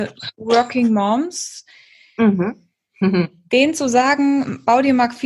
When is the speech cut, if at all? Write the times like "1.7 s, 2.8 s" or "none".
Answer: none